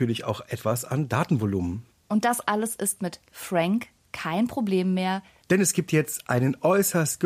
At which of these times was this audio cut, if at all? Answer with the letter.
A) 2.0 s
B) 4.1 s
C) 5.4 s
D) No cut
D